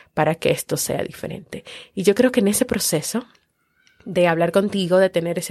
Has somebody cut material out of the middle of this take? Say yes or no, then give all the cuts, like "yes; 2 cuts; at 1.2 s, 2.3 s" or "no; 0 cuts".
no; 0 cuts